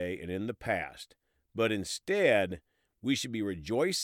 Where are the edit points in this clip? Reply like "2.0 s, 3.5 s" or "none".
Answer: none